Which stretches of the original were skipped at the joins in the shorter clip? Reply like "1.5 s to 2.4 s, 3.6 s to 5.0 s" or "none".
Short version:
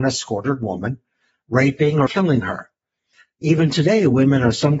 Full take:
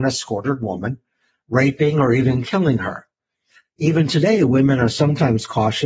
2.1 s to 2.4 s